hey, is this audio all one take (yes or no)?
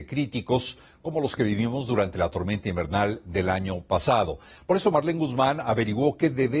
yes